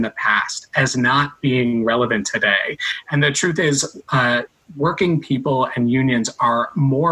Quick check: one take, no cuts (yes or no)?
yes